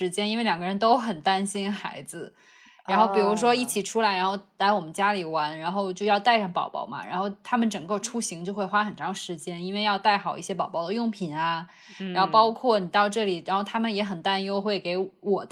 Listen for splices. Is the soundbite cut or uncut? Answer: uncut